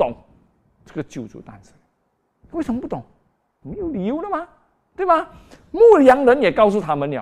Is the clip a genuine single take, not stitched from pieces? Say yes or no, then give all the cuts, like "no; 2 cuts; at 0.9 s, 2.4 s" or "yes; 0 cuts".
no; 1 cut; at 3.6 s